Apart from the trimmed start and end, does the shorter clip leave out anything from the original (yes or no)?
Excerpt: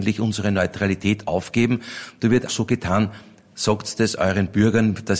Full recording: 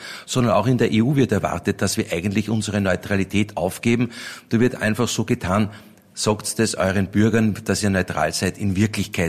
yes